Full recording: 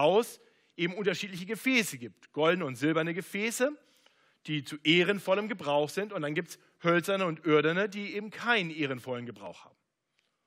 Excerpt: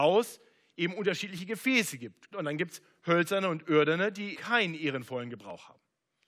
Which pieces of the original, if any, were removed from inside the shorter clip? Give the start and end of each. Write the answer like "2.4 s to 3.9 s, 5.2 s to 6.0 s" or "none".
2.3 s to 6.1 s, 8.1 s to 8.3 s